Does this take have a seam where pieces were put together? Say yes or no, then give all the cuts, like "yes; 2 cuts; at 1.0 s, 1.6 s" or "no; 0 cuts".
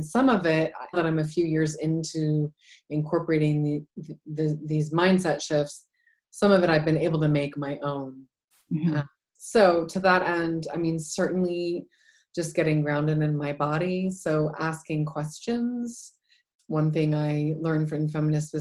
yes; 1 cut; at 0.9 s